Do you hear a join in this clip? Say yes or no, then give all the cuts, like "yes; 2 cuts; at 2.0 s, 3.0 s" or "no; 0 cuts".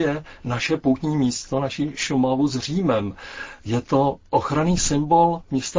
no; 0 cuts